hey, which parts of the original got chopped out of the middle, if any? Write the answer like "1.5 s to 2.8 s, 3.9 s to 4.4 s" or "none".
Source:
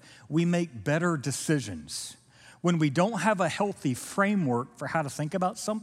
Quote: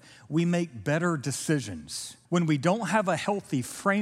2.3 s to 2.6 s